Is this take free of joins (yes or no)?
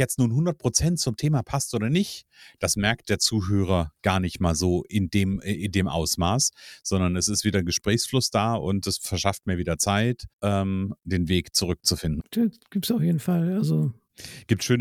no